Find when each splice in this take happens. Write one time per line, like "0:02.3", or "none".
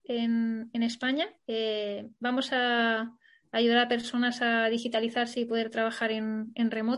none